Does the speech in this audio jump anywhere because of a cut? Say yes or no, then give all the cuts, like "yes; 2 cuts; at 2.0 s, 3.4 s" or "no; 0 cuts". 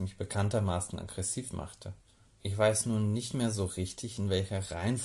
yes; 1 cut; at 2.4 s